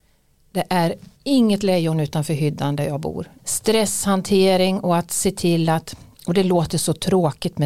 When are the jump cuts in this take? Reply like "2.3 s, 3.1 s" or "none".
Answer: 1.1 s, 3.4 s